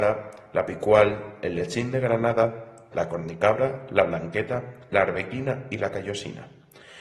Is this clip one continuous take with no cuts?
no; 1 cut; at 2.9 s

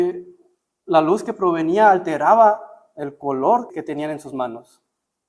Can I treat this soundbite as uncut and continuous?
no; 1 cut; at 3.7 s

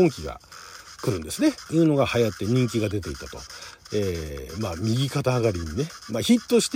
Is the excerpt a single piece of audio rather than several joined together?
no; 2 cuts; at 1.7 s, 3.9 s

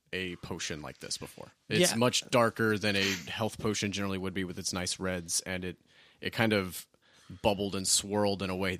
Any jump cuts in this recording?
yes; 1 cut; at 1.6 s

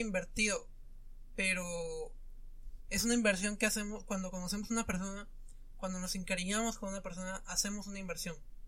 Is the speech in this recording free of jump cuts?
yes; 0 cuts

